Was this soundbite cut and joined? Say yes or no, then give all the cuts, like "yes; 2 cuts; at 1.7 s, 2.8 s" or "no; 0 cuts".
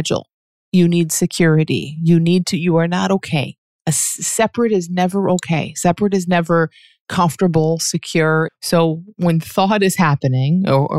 yes; 1 cut; at 8.5 s